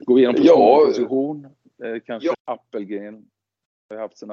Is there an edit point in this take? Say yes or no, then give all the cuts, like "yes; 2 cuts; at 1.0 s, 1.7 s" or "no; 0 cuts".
yes; 1 cut; at 2.3 s